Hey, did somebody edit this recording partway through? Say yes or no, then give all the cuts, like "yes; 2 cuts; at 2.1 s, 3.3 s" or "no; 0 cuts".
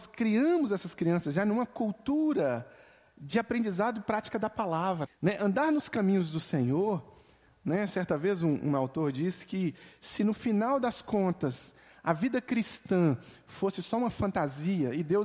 yes; 1 cut; at 5.1 s